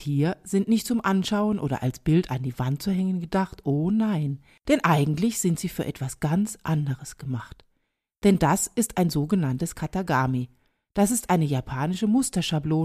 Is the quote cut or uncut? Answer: uncut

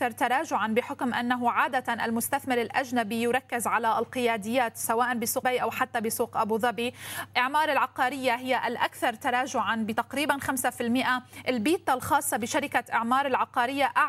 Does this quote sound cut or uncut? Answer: cut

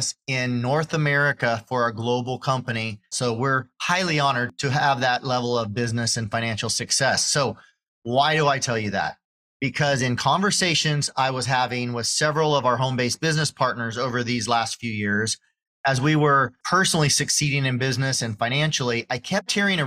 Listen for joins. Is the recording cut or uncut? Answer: cut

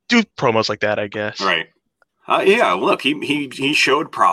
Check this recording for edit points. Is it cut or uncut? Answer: cut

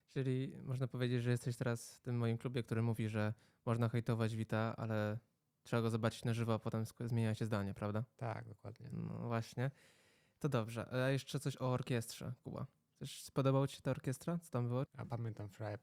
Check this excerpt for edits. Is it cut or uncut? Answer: cut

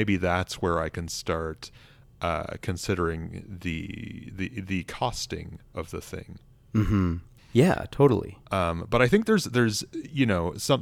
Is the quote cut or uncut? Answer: cut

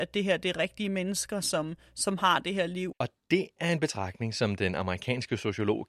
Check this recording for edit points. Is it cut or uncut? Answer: cut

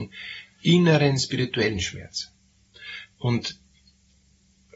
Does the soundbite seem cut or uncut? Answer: uncut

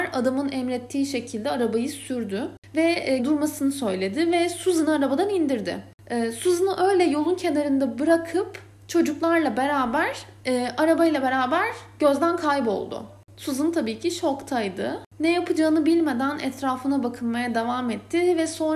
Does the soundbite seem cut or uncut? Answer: cut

